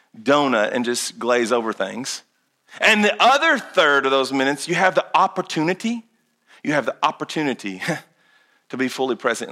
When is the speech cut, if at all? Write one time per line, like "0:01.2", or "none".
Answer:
none